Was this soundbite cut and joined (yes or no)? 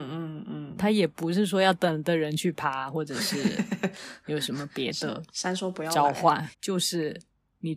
yes